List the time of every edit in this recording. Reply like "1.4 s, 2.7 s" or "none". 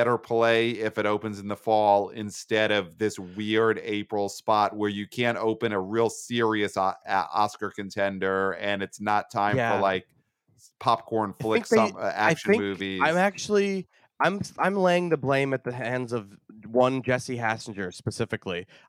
none